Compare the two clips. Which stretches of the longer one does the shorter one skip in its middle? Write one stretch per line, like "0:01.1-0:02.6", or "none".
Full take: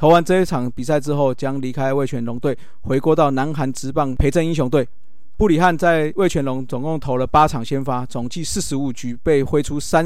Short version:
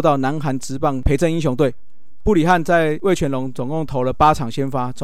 none